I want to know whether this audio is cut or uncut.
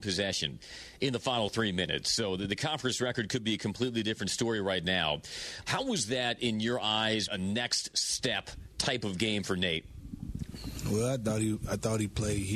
cut